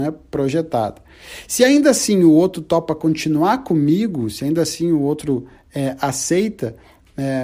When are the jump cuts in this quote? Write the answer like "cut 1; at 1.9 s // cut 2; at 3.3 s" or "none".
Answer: none